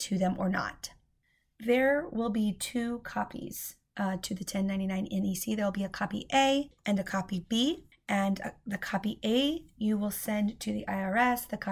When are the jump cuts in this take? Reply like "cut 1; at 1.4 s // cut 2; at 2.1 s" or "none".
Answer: none